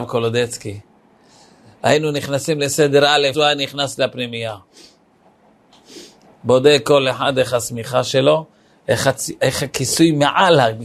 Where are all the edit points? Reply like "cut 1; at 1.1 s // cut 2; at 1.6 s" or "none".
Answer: cut 1; at 3.3 s

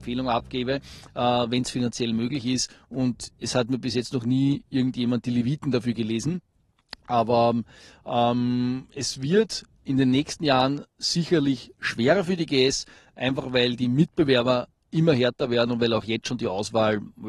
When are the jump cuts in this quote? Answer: none

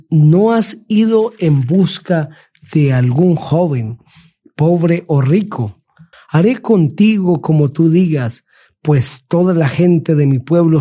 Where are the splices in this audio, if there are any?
cut 1; at 6.1 s

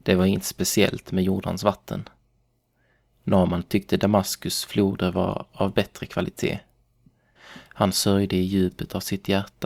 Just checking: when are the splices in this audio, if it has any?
cut 1; at 7.4 s

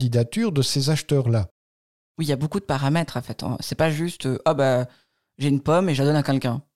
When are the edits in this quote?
none

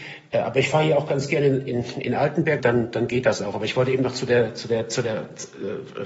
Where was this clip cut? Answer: cut 1; at 2.6 s

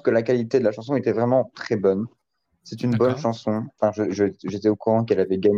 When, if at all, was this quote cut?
cut 1; at 3.8 s

